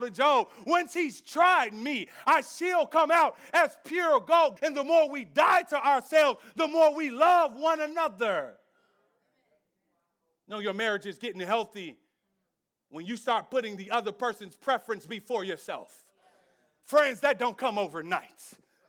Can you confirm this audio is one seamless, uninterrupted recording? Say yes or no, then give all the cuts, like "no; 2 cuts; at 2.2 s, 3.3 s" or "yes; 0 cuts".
no; 1 cut; at 4.6 s